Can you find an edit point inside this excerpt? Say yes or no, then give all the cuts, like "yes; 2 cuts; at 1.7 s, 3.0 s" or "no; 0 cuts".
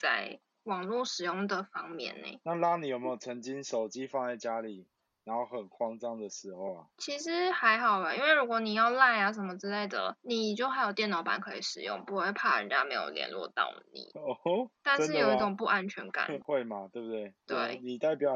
no; 0 cuts